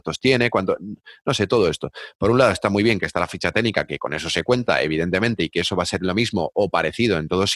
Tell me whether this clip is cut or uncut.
uncut